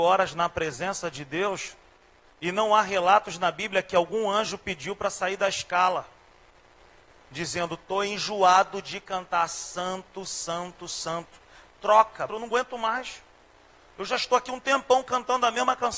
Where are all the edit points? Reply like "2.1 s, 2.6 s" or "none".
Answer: 12.3 s